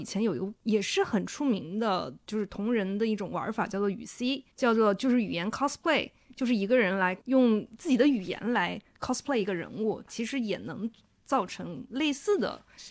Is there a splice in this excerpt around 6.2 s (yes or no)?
no